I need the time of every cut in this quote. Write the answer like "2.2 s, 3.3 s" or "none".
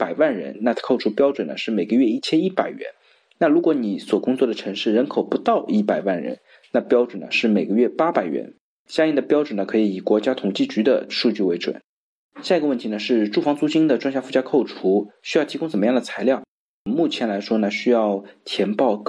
none